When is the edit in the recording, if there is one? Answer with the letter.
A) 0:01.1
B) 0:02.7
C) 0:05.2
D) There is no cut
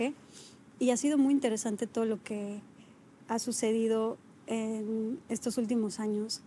D